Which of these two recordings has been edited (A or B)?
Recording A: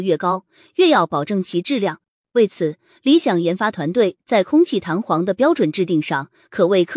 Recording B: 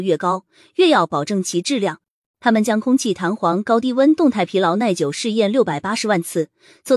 B